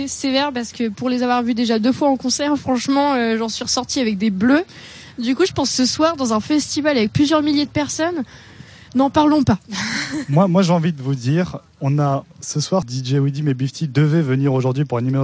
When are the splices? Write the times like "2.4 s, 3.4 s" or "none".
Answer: 12.8 s